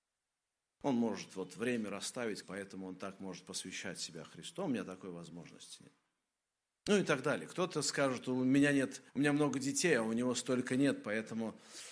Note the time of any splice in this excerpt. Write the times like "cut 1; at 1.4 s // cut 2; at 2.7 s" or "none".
cut 1; at 2.4 s // cut 2; at 9.1 s